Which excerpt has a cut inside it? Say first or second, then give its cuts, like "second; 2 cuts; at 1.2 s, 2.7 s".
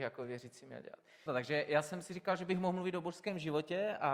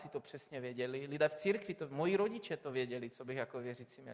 first; 1 cut; at 1.3 s